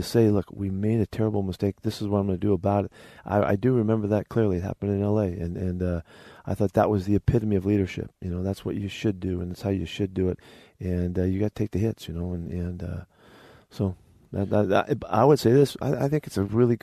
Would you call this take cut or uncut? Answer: uncut